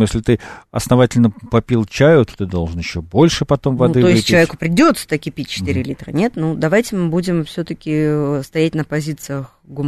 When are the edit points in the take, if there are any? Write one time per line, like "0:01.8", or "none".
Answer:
none